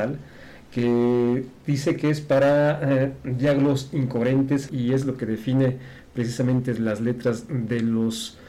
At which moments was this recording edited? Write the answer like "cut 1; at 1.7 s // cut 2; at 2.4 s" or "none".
cut 1; at 1.6 s // cut 2; at 4.7 s